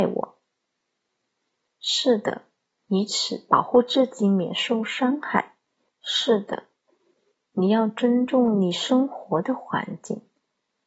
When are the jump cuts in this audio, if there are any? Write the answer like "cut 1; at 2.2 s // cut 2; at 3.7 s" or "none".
cut 1; at 2.9 s // cut 2; at 5.9 s